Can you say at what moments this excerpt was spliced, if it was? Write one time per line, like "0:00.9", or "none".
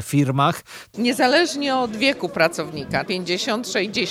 0:00.9
0:03.1